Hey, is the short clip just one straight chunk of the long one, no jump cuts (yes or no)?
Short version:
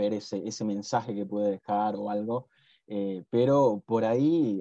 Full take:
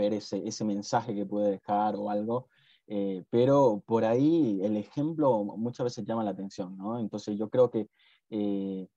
yes